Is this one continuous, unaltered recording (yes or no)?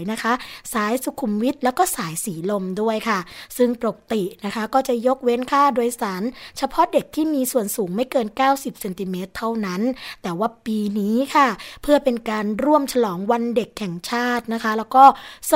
yes